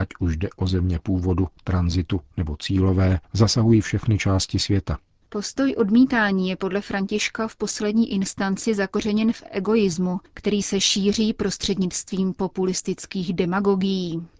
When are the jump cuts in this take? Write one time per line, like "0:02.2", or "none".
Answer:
0:03.2
0:05.2